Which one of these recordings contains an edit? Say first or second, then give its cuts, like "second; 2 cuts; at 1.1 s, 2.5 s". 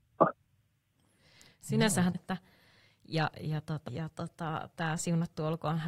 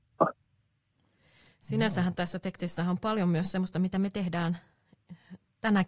first; 2 cuts; at 2.1 s, 3.9 s